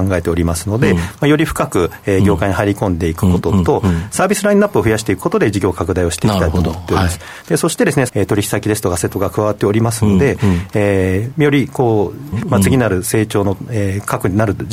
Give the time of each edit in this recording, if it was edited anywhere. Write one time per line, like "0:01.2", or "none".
0:08.1
0:12.3